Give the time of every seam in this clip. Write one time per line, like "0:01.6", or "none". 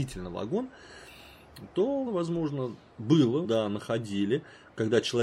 0:02.1
0:03.4